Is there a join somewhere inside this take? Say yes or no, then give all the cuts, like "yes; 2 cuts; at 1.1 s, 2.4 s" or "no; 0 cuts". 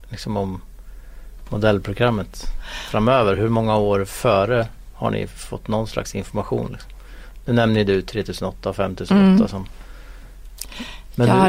no; 0 cuts